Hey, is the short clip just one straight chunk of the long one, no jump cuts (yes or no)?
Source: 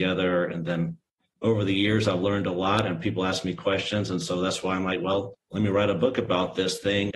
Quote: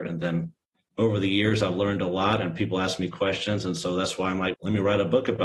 no